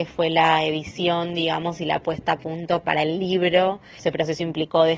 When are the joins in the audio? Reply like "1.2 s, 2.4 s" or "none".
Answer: 4.0 s